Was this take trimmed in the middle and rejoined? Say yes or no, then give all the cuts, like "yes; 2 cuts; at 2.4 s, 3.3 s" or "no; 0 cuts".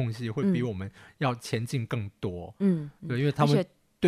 no; 0 cuts